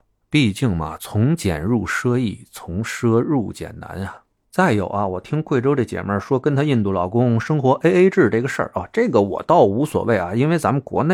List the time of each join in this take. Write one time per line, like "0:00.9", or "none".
none